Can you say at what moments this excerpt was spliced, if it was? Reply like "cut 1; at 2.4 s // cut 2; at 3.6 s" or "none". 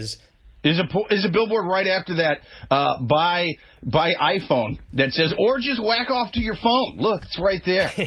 none